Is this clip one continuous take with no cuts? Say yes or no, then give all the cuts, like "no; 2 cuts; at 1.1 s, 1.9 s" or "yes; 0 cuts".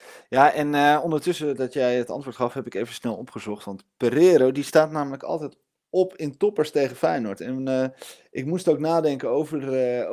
yes; 0 cuts